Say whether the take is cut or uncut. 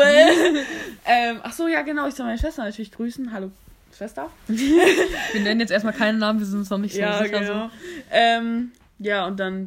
uncut